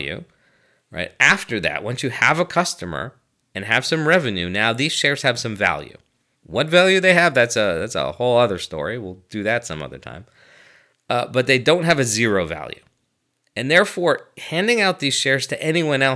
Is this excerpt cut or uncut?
uncut